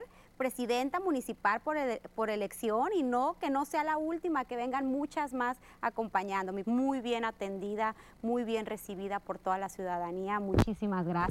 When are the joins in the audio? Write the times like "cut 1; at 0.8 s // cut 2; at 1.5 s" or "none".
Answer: cut 1; at 6.6 s